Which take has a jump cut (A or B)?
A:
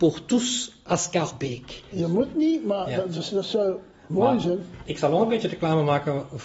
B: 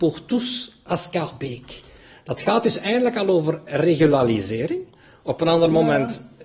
A